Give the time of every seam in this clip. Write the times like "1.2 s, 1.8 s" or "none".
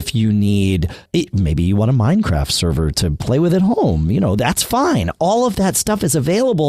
1.1 s

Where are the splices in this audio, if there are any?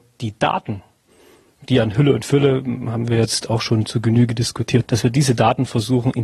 4.8 s

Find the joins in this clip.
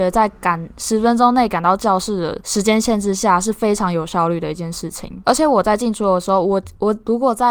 none

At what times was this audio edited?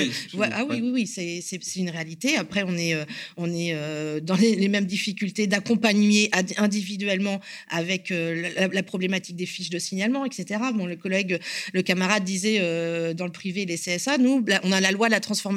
none

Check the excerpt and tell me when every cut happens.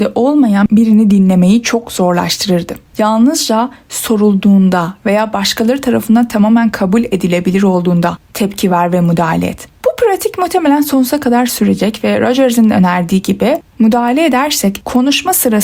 2.9 s

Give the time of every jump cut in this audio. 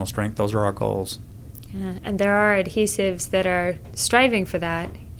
none

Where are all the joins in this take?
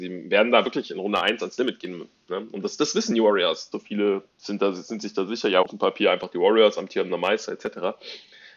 3.7 s, 5.6 s

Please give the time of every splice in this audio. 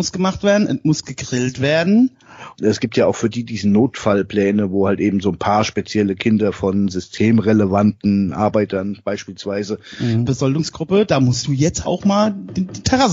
2.5 s, 10.2 s, 11.8 s

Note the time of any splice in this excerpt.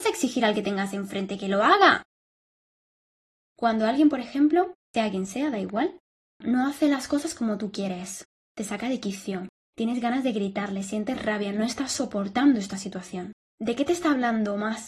none

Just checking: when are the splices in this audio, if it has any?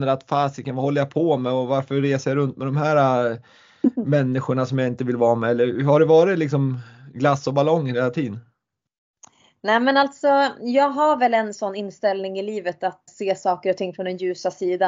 13.1 s

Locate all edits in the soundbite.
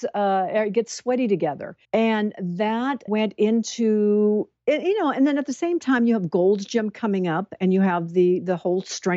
1.8 s, 3.1 s

